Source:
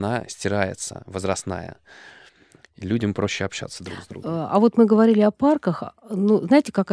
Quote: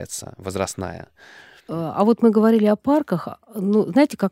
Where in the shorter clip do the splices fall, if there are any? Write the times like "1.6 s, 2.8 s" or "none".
1.7 s